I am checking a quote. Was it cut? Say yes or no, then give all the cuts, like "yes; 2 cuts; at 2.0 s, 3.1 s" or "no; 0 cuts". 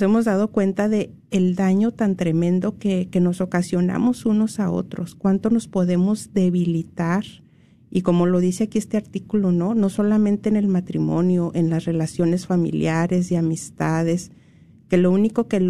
no; 0 cuts